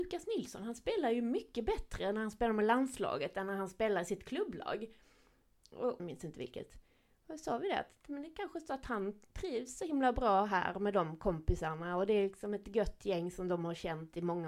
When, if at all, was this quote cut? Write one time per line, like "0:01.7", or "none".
0:06.0